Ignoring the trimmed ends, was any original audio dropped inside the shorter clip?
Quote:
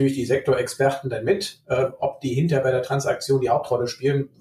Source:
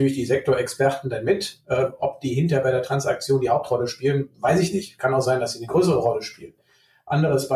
no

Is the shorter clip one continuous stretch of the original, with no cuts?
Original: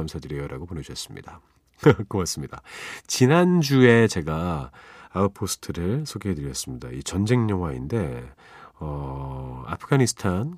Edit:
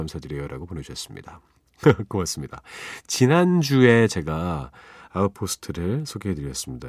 yes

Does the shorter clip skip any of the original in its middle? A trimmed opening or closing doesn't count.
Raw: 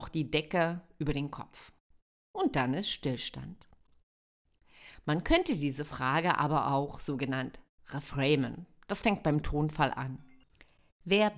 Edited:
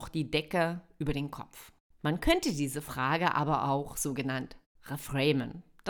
yes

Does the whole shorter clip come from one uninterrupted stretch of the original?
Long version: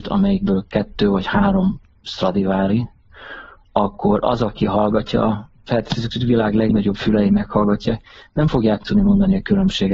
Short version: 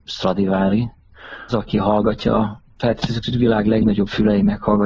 no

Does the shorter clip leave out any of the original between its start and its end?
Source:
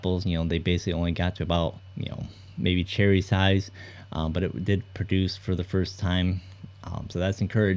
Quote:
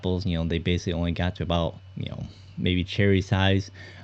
no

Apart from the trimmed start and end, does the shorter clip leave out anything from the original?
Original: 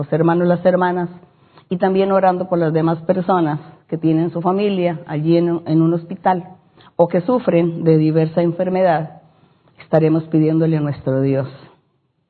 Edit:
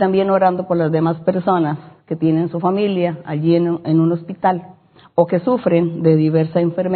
no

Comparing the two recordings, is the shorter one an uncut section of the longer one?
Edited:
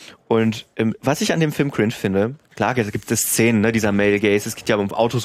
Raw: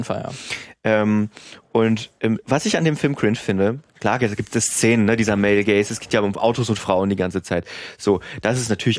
yes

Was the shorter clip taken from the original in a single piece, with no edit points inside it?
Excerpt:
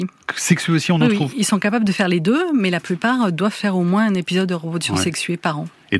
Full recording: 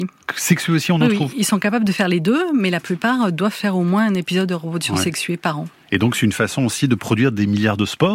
yes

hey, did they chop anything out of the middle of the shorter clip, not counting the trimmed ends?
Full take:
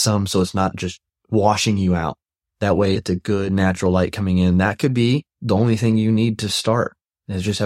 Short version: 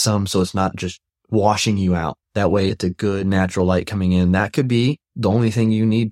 yes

